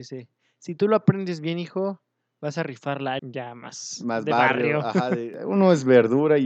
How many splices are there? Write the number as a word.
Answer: one